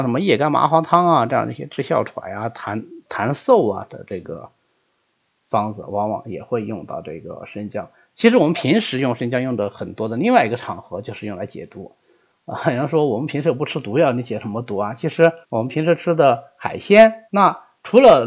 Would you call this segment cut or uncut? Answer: cut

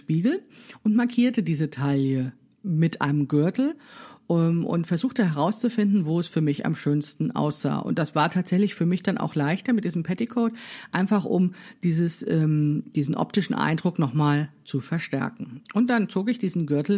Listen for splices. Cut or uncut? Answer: cut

